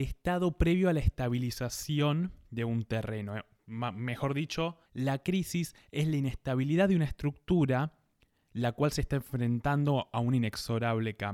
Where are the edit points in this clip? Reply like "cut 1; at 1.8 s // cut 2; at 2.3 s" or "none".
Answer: cut 1; at 4.9 s